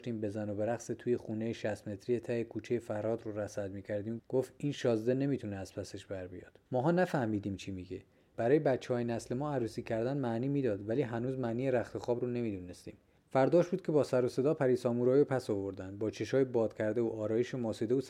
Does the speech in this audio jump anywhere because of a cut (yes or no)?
yes